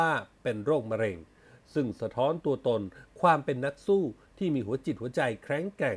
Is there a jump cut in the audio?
no; 0 cuts

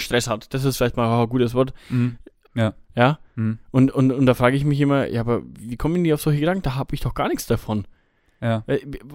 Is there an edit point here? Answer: yes; 1 cut; at 2.4 s

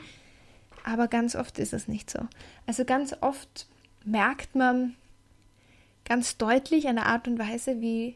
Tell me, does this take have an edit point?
no; 0 cuts

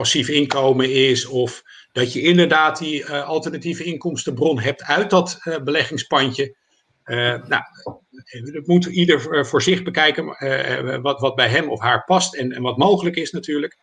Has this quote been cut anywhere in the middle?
no; 0 cuts

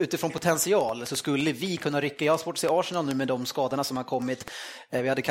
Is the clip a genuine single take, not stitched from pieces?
yes; 0 cuts

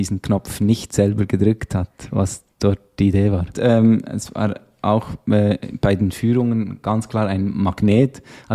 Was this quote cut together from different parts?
yes; 1 cut; at 3.5 s

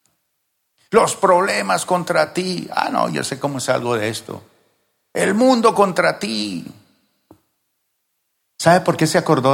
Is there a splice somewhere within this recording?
yes; 1 cut; at 8.4 s

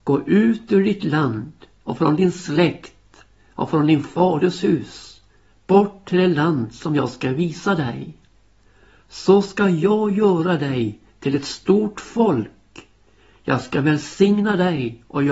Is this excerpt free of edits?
yes; 0 cuts

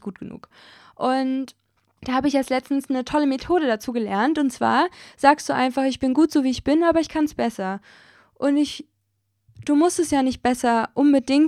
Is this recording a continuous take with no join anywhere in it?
yes; 0 cuts

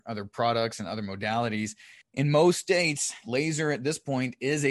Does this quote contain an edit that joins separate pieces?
yes; 1 cut; at 2.0 s

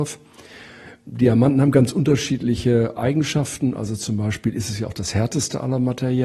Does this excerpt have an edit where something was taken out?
no; 0 cuts

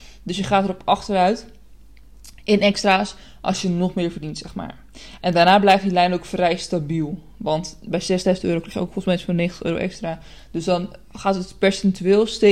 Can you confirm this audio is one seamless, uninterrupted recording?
yes; 0 cuts

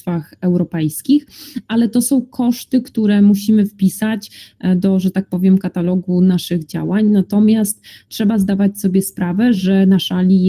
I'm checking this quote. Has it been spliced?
no; 0 cuts

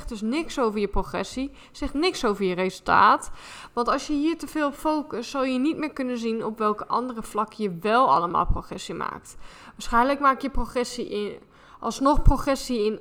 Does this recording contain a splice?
no; 0 cuts

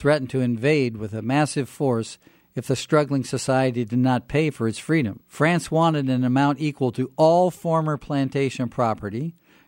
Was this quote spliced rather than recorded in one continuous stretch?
yes; 1 cut; at 5.2 s

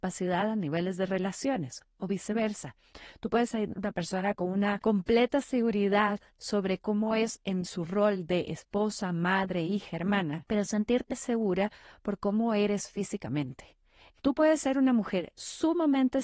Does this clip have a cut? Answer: yes; 2 cuts; at 11.1 s, 14.1 s

